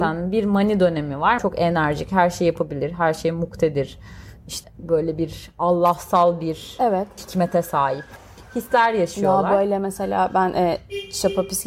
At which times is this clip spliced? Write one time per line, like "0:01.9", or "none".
0:01.4